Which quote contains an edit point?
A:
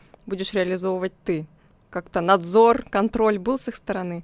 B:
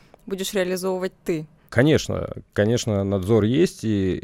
B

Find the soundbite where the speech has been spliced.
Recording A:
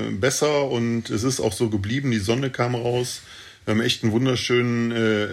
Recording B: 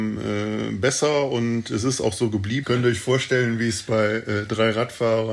B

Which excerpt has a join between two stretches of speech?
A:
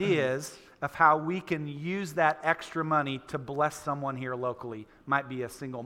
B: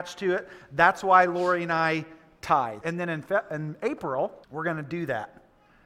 B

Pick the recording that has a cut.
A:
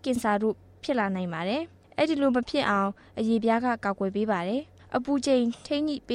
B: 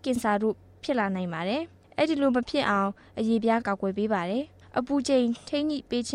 B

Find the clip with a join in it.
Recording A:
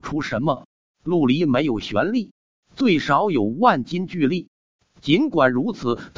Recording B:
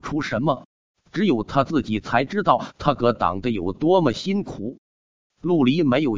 A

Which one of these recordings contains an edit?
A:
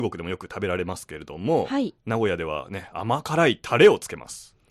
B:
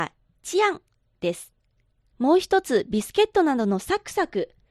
B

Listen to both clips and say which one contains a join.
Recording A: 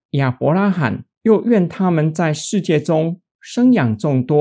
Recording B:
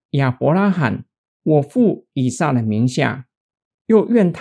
A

